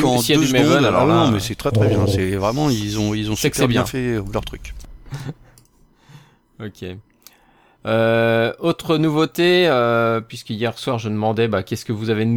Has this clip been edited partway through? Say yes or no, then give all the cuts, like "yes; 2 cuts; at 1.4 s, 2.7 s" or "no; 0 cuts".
no; 0 cuts